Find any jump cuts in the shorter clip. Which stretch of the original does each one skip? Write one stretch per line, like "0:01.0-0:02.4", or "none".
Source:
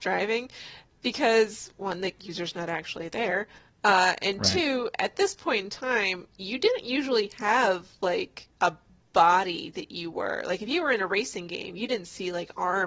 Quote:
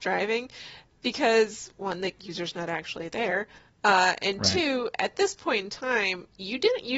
none